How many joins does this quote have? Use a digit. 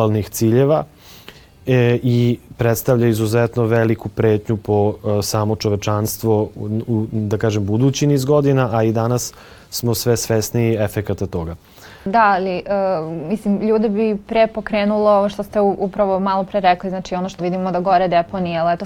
1